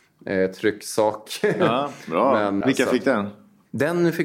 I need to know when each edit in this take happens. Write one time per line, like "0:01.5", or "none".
0:02.6